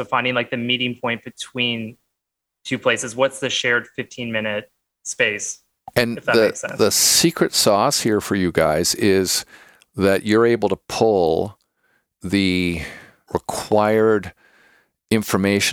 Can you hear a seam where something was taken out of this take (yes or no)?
no